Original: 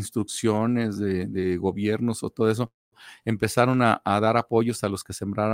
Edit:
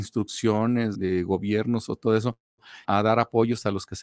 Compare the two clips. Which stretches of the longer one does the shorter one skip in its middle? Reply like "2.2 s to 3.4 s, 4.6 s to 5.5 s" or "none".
0.9 s to 1.3 s, 3.2 s to 4.0 s